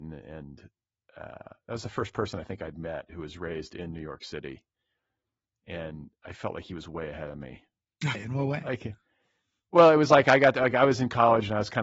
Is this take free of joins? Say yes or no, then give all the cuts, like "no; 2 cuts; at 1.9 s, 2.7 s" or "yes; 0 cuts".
no; 1 cut; at 8.1 s